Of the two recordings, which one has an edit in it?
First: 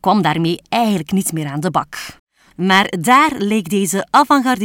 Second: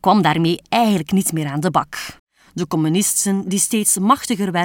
first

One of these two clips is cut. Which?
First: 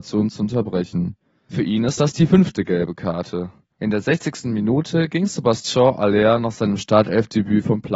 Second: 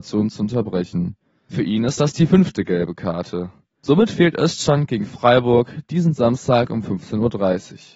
first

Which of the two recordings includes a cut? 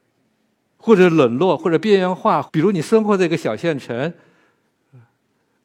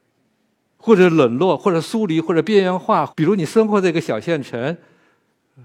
first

